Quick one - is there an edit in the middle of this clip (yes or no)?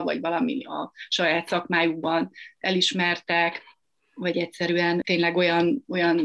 no